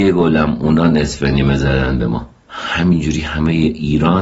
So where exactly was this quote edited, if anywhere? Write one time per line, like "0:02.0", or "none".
0:02.4